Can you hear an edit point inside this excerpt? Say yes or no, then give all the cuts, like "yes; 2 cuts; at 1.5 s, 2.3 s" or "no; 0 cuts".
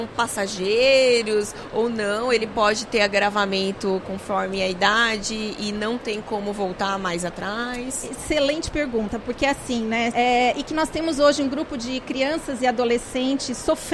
yes; 1 cut; at 10.1 s